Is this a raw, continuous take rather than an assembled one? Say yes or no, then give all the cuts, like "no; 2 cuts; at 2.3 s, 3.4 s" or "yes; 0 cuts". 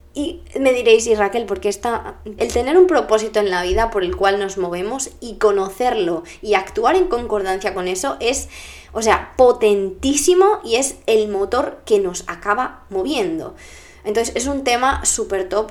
no; 1 cut; at 2.4 s